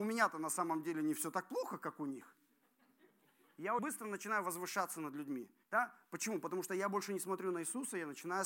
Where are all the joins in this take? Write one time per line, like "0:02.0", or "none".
0:03.8
0:05.6

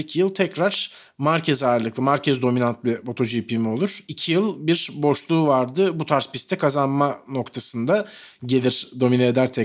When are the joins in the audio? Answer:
0:04.1
0:08.4

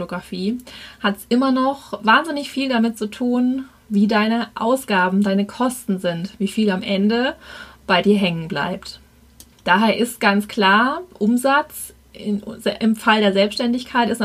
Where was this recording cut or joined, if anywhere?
none

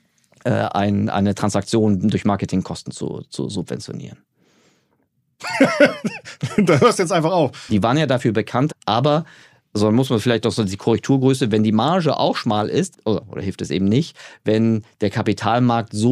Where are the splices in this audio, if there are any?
0:07.7
0:08.7
0:12.9

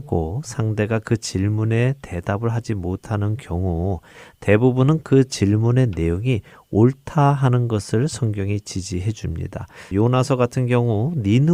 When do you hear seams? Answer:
0:09.9

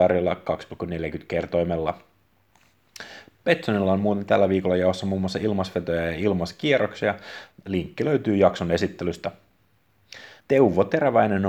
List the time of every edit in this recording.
0:07.5
0:10.4

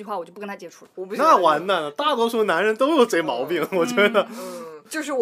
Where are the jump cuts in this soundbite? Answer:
0:00.9

